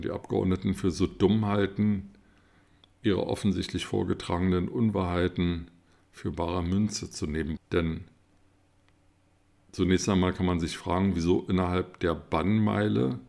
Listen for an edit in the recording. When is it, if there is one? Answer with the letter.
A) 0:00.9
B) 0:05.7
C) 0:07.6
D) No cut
C